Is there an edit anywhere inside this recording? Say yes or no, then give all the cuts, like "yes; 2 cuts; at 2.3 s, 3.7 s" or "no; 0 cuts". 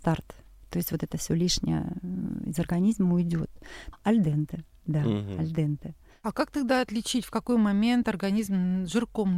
yes; 1 cut; at 3.9 s